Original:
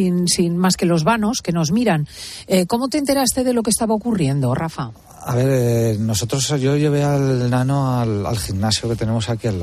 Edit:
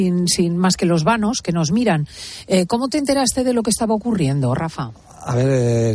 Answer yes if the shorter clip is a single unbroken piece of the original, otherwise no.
yes